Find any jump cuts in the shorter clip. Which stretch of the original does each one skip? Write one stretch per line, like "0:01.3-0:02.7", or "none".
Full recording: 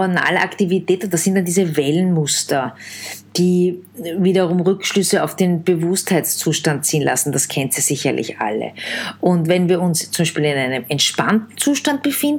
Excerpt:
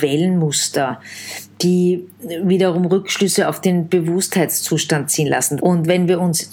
0:07.3-0:09.2